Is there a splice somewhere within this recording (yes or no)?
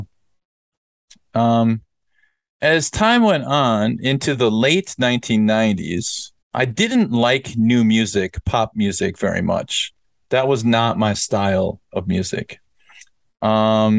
yes